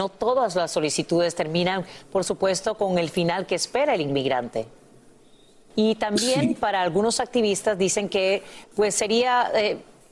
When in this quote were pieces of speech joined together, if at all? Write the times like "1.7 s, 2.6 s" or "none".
5.7 s